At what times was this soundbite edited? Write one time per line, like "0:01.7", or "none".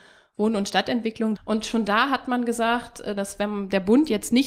0:01.3
0:03.2